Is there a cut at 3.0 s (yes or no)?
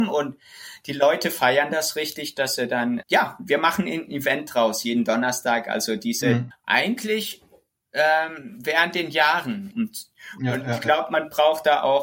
yes